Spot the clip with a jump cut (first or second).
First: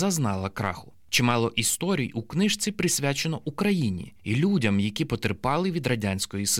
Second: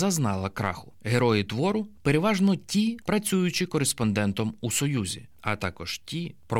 second